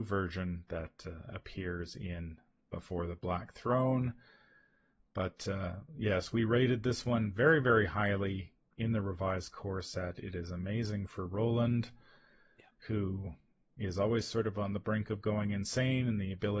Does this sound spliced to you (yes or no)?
no